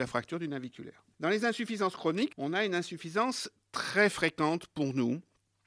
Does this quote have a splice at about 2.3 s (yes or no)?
yes